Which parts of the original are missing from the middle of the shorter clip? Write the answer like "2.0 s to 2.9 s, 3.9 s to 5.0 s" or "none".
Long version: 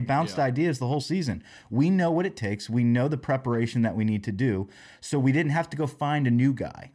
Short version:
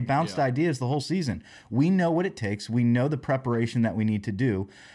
none